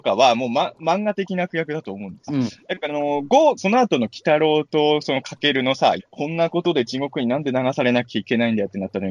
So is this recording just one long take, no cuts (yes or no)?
no